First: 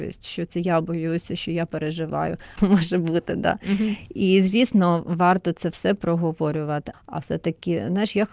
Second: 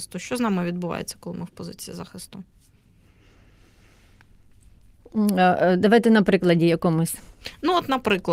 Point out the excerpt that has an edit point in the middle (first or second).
first